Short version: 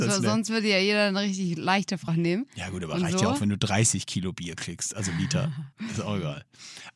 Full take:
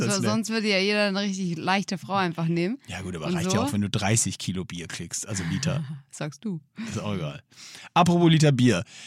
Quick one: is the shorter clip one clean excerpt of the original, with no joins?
no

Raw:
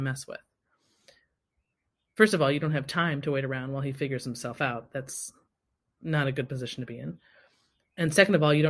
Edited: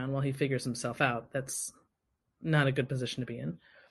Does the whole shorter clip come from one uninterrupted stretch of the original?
yes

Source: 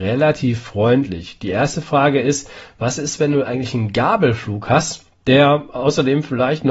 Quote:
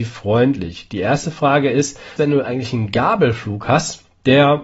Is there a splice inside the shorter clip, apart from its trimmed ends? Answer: yes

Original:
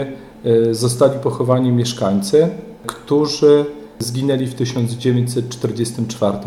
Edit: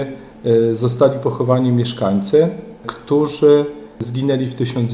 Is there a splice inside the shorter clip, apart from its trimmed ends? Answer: no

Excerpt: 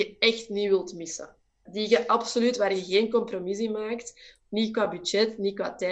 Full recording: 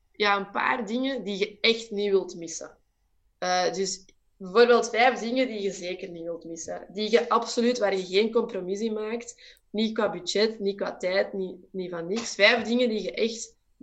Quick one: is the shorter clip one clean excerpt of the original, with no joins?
no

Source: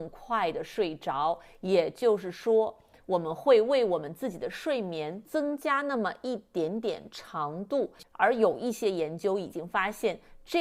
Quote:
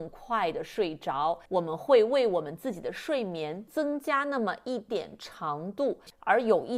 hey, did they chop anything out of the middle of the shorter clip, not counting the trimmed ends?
yes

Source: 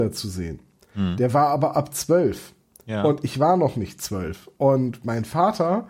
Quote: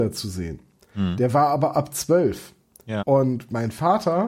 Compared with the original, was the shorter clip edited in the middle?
yes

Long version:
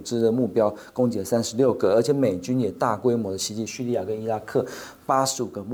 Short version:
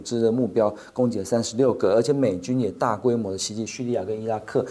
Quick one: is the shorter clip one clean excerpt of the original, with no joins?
yes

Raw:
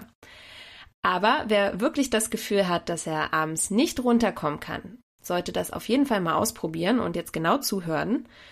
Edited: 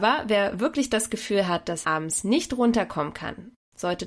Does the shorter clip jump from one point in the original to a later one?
yes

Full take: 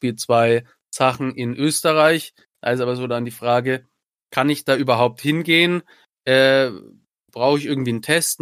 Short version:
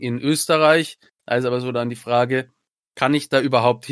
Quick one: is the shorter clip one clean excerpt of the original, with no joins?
yes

